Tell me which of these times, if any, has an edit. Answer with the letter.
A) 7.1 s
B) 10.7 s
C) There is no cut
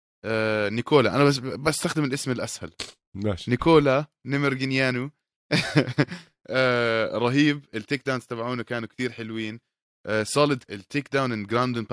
B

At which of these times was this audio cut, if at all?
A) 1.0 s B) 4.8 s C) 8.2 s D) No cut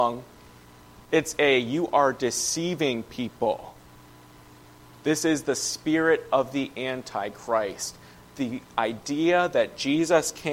D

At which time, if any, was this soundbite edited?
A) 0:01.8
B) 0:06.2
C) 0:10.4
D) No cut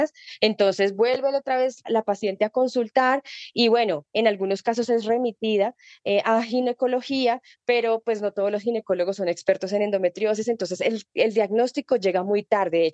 A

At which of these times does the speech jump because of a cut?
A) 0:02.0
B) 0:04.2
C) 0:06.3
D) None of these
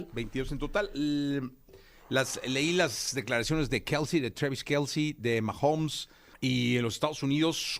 C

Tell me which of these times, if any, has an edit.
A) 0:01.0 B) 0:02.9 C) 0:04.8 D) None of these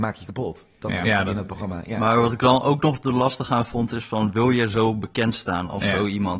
A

